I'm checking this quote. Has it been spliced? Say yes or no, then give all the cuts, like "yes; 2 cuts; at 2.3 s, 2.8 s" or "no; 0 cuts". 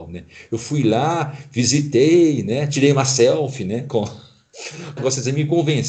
yes; 1 cut; at 5.0 s